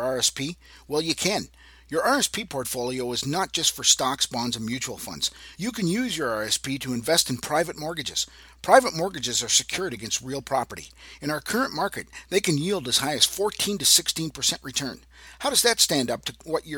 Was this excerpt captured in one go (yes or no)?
yes